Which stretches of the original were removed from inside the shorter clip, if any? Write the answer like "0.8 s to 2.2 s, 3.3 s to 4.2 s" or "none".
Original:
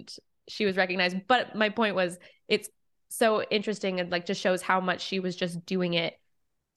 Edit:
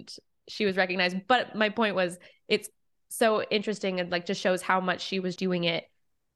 5.4 s to 5.7 s